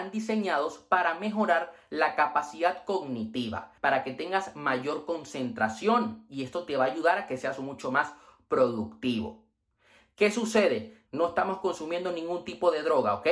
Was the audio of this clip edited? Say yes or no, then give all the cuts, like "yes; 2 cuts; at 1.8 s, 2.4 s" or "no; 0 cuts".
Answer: yes; 2 cuts; at 3.8 s, 11.1 s